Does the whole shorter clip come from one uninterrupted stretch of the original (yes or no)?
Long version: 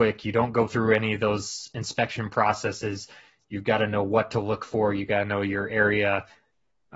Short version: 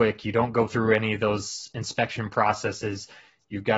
yes